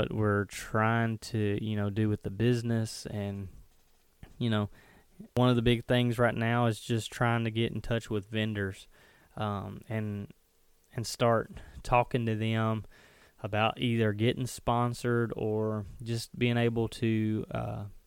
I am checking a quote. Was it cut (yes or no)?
no